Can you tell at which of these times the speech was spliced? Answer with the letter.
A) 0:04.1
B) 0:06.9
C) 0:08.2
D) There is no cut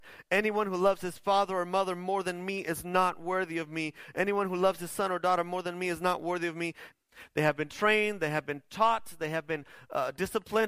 B